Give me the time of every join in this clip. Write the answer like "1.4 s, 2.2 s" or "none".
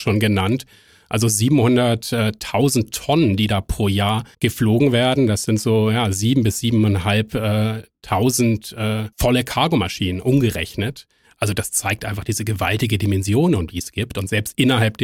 4.3 s, 9.1 s